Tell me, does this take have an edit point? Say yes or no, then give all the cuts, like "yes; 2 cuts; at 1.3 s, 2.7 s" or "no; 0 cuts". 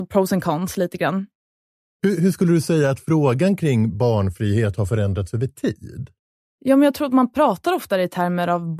no; 0 cuts